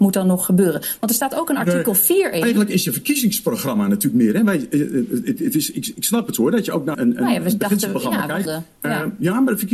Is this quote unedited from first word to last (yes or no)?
no